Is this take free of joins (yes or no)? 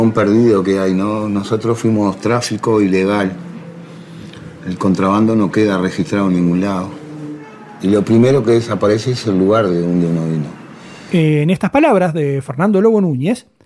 no